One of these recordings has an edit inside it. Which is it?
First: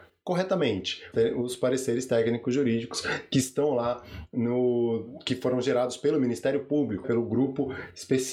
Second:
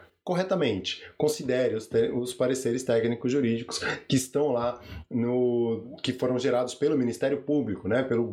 first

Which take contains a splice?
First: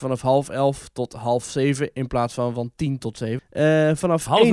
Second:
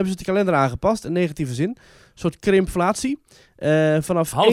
first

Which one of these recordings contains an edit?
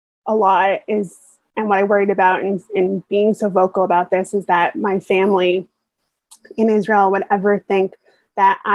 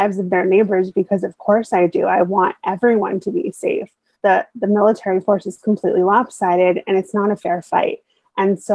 second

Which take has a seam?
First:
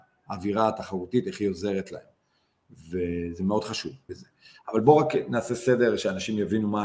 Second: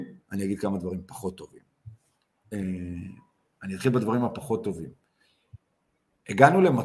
first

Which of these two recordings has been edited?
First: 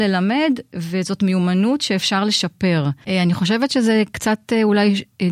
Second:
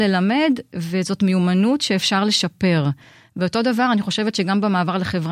first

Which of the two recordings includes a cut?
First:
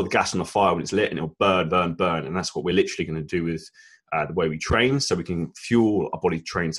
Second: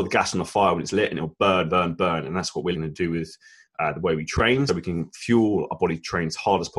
second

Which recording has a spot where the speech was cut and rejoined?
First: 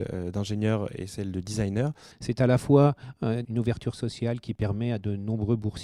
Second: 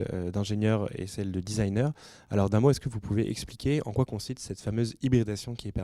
first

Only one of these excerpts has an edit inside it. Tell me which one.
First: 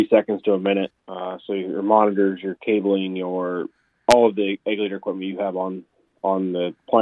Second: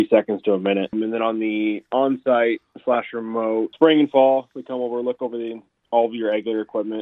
first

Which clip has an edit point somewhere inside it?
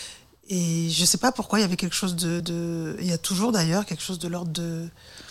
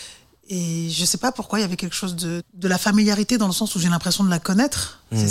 second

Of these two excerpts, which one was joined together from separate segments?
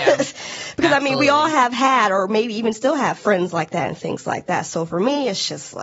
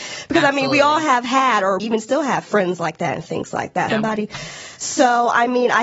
second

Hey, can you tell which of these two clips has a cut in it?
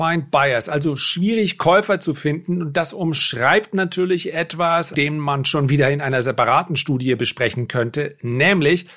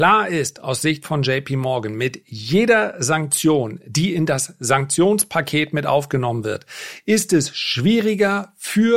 first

